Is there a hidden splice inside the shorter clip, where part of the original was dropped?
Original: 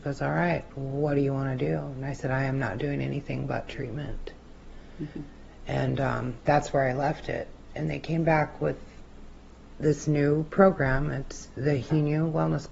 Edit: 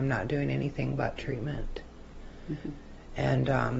no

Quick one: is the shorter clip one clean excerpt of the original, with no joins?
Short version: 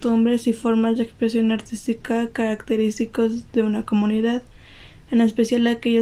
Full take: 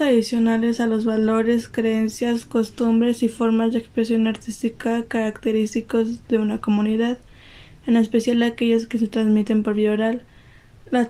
yes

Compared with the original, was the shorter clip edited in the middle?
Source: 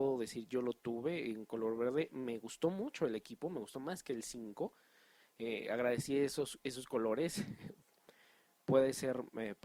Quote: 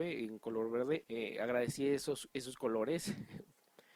yes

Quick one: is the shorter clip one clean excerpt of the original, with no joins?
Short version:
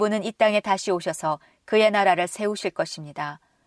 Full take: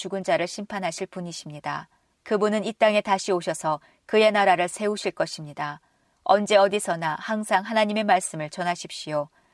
yes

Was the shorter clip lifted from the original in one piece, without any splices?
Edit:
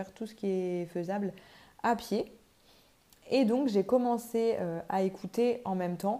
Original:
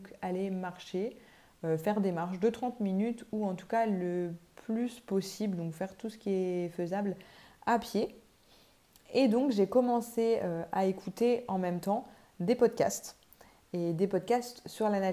yes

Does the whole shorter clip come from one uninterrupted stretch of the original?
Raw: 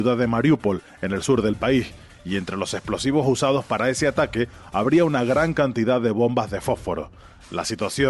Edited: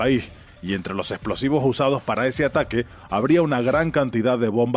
yes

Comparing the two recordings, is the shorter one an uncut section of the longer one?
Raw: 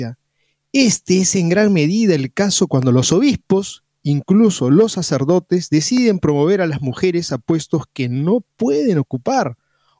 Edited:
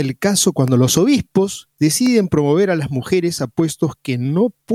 no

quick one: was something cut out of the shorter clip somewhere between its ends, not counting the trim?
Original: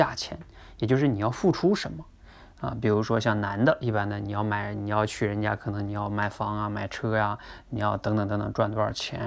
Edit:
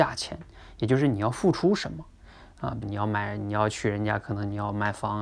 yes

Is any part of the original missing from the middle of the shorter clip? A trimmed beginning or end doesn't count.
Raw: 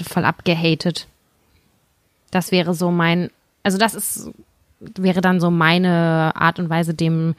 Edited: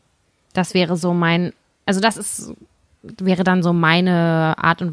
no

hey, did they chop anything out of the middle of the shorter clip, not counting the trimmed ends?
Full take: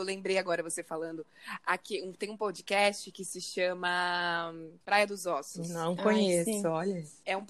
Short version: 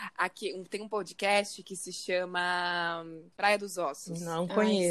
no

